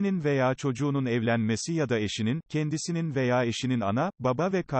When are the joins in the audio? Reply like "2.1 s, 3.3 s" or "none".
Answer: 2.4 s